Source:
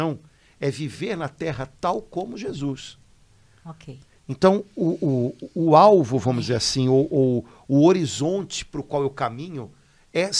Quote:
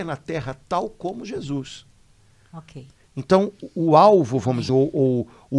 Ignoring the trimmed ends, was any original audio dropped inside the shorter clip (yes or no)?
yes